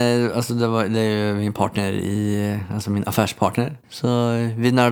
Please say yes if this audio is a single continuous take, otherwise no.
no